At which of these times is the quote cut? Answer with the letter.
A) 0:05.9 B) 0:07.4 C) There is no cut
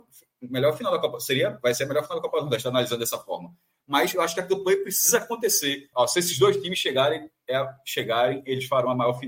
A